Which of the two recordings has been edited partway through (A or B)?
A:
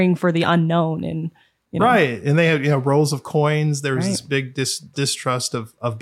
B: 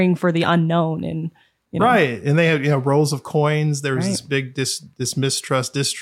A